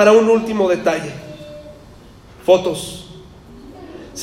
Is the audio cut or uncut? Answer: uncut